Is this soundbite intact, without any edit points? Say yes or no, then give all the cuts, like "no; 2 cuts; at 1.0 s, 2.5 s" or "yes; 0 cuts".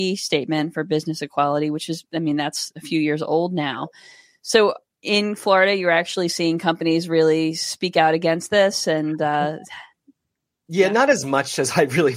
yes; 0 cuts